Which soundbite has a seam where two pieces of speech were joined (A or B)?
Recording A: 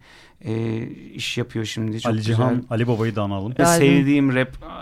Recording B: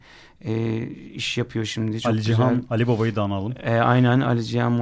A